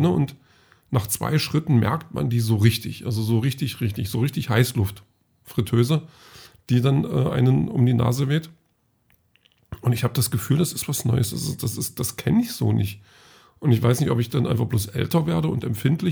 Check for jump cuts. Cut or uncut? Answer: uncut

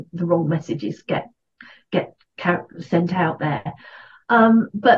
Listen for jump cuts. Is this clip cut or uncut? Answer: uncut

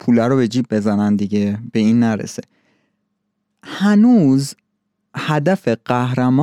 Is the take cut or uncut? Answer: uncut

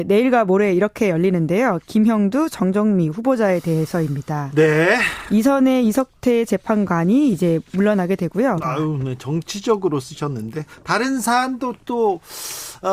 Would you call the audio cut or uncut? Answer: cut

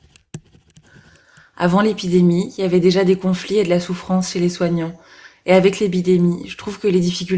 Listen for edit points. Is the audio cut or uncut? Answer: uncut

